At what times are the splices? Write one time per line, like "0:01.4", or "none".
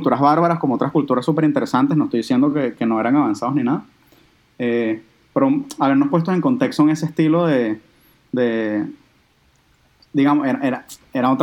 none